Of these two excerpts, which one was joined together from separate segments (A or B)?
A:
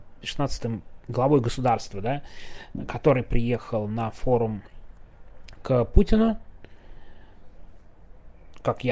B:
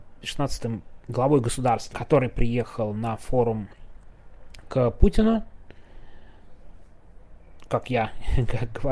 B